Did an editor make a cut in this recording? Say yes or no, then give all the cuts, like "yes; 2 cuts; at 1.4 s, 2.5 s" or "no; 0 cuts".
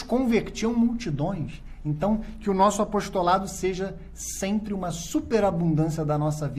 no; 0 cuts